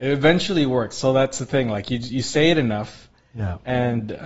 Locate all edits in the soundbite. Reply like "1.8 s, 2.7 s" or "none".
none